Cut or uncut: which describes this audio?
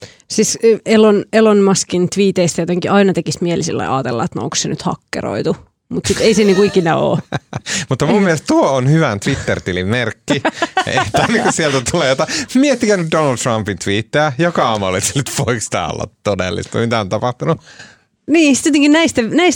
uncut